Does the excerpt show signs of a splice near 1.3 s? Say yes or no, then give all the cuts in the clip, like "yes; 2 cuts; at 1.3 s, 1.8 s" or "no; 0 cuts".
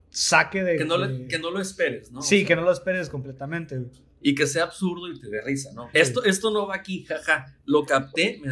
no; 1 cut; at 5.9 s